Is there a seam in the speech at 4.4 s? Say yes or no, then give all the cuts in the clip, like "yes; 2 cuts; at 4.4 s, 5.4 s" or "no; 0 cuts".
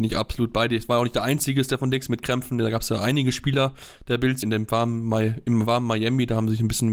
yes; 1 cut; at 4.4 s